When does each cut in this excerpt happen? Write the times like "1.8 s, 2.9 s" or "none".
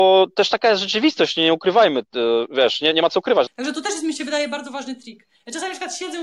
3.5 s